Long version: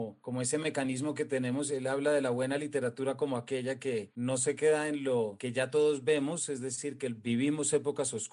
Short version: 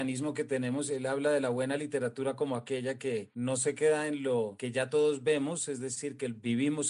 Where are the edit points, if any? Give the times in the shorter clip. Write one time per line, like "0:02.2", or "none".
none